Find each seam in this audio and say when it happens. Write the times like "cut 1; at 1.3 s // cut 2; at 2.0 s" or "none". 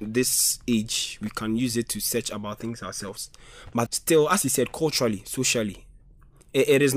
cut 1; at 3.9 s